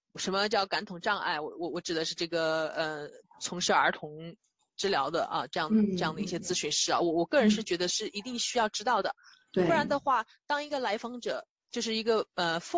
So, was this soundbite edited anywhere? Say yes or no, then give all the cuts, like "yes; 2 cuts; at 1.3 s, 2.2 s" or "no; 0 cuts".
no; 0 cuts